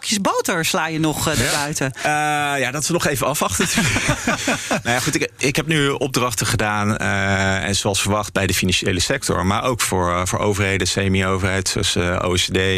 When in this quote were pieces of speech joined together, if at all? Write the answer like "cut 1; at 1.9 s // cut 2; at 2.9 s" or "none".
none